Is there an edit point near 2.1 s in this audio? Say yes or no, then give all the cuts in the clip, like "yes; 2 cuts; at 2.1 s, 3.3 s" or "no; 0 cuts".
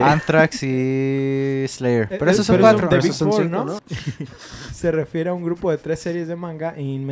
no; 1 cut; at 3.8 s